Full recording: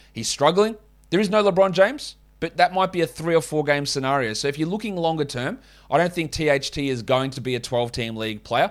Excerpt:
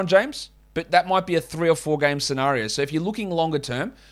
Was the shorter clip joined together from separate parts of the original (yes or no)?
no